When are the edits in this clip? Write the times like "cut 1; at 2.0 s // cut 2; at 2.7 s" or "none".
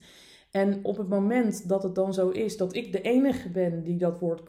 none